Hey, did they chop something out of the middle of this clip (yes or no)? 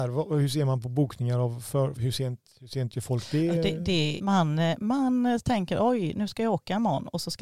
yes